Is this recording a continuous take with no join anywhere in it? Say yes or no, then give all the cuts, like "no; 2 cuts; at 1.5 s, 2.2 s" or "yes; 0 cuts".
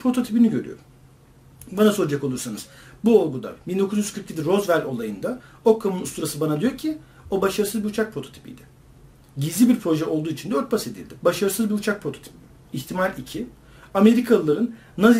no; 2 cuts; at 11.2 s, 12.7 s